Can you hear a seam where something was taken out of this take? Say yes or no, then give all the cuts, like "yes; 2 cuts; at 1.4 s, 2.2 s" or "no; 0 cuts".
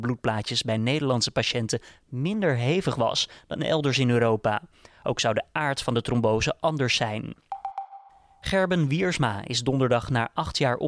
no; 0 cuts